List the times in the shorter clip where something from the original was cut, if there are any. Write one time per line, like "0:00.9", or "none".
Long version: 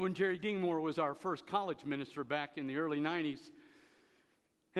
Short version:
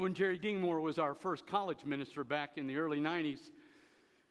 none